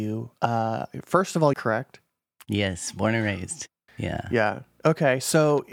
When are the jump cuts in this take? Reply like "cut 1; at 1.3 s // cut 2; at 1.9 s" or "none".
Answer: cut 1; at 1.5 s // cut 2; at 3.9 s